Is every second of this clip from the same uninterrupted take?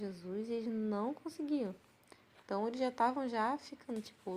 yes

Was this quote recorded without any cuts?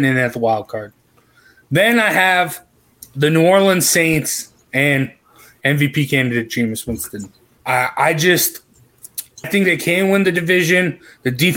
no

